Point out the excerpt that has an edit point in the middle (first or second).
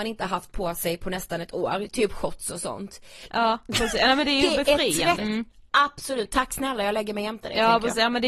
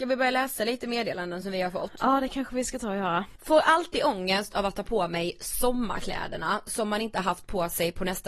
first